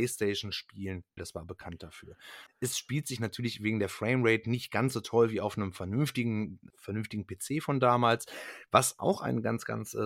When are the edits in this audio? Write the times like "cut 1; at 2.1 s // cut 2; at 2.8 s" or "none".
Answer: cut 1; at 1.2 s // cut 2; at 2.5 s // cut 3; at 6.7 s